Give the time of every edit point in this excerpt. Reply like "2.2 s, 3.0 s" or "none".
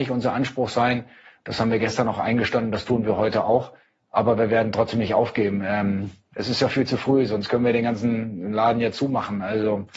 none